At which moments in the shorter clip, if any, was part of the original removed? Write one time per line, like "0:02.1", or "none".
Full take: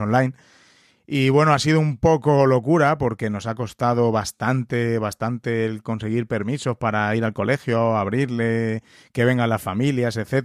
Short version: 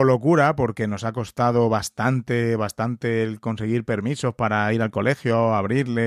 none